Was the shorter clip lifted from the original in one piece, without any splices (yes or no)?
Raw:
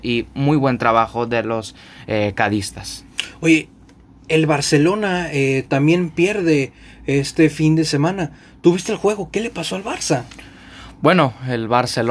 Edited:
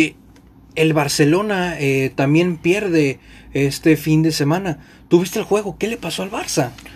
yes